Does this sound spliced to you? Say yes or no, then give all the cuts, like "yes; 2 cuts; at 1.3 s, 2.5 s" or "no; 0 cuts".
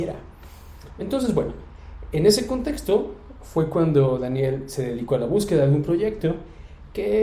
no; 0 cuts